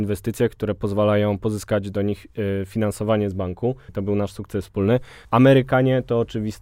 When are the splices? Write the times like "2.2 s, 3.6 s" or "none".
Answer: 3.9 s, 5.2 s